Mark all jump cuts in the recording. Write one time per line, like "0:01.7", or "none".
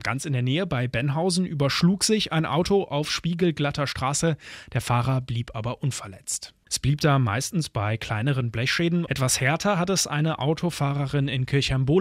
0:06.7
0:09.1